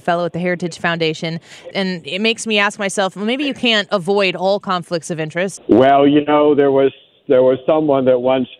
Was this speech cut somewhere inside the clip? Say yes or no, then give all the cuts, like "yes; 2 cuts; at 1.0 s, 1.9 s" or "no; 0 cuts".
yes; 2 cuts; at 1.7 s, 5.6 s